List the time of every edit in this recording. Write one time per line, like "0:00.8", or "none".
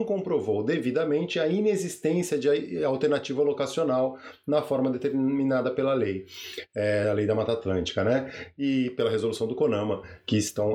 none